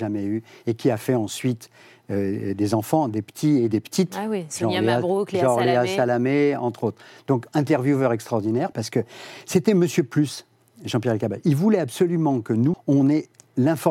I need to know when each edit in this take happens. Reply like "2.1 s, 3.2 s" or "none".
8.7 s, 12.7 s